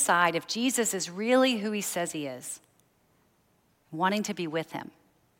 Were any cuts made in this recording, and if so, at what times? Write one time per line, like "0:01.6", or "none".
none

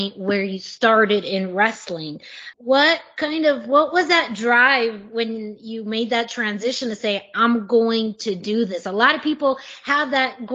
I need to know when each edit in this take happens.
0:02.5

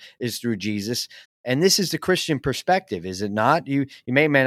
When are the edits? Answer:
0:01.2

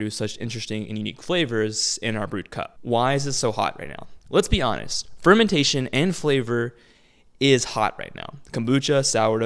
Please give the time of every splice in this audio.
none

